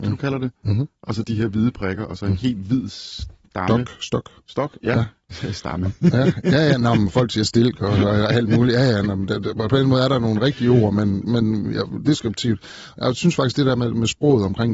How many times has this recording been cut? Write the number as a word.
zero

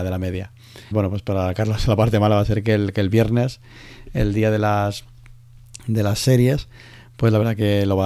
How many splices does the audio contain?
one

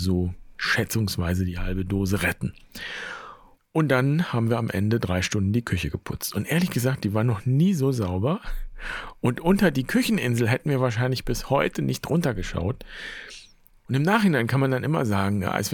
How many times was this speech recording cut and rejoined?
two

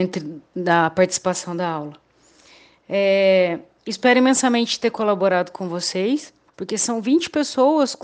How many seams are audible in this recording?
one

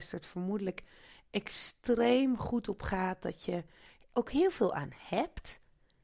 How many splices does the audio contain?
zero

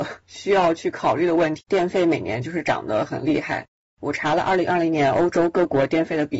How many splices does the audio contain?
one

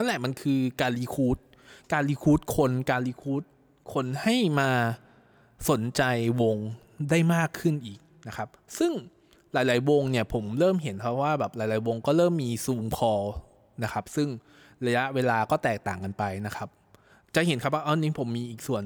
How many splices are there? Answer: zero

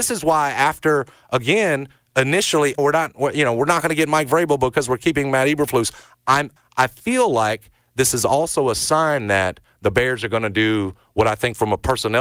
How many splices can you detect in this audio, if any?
two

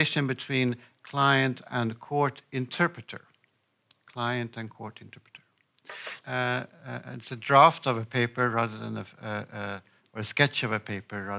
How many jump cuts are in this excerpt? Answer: one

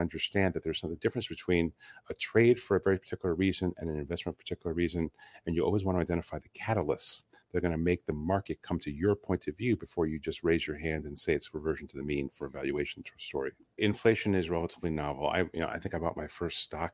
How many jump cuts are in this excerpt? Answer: one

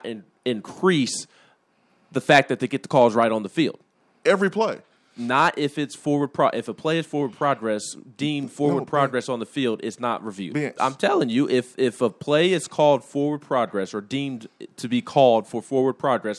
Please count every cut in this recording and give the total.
two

